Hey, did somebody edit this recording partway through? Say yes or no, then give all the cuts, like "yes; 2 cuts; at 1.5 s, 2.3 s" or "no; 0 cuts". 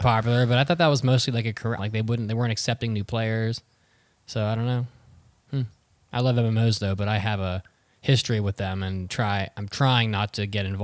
yes; 1 cut; at 1.8 s